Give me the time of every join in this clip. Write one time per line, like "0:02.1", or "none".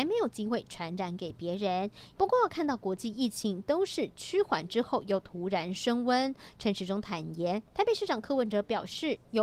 0:02.1
0:07.7